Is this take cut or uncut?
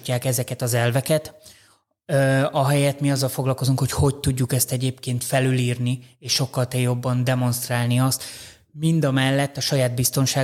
uncut